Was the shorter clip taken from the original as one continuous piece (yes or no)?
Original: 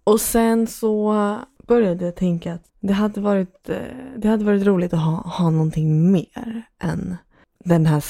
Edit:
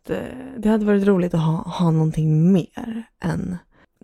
yes